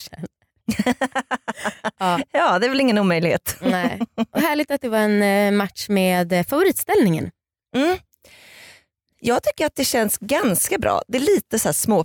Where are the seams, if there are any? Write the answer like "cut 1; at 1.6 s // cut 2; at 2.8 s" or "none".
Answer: none

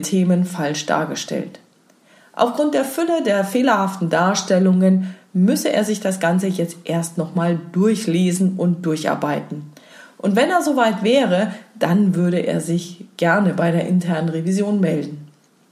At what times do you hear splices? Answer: none

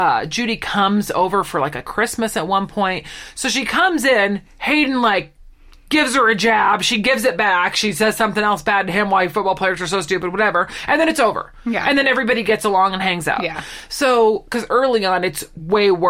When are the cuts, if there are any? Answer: none

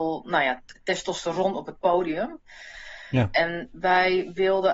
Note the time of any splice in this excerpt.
none

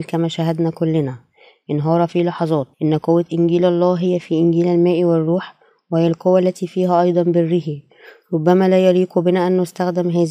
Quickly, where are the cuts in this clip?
cut 1; at 2.7 s

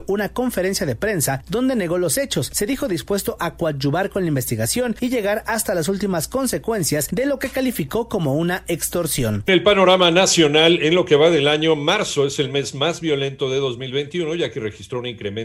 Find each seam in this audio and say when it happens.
cut 1; at 9.5 s

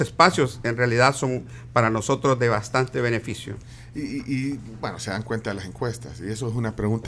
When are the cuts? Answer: none

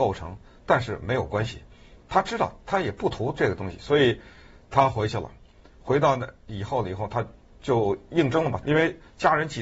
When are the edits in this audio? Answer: cut 1; at 8.6 s

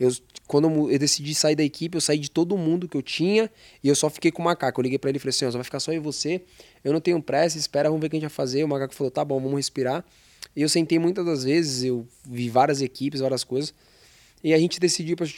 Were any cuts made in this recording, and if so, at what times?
none

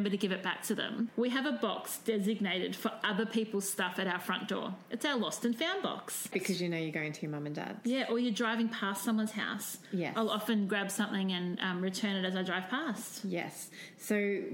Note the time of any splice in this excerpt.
cut 1; at 6.3 s

